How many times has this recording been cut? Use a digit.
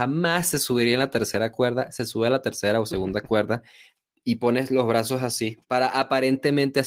1